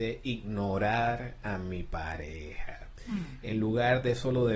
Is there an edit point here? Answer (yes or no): no